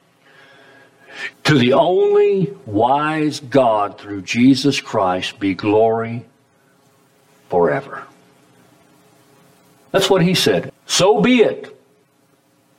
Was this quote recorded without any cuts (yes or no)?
no